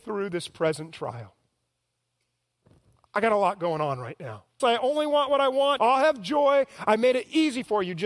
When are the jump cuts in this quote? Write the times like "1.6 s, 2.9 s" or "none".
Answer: 4.6 s, 5.8 s